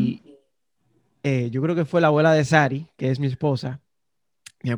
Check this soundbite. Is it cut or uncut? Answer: uncut